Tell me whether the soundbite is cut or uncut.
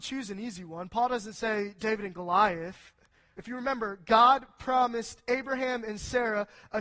cut